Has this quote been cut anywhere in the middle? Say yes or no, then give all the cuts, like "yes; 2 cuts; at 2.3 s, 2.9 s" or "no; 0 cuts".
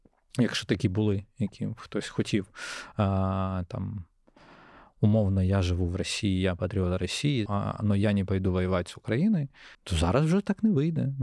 yes; 2 cuts; at 7.5 s, 9.7 s